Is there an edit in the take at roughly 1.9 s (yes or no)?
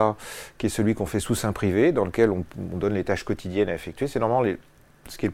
no